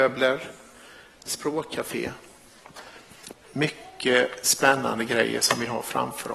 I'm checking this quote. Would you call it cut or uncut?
cut